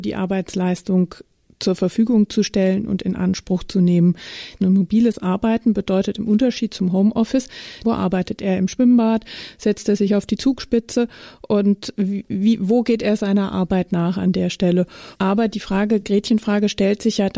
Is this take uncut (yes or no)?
no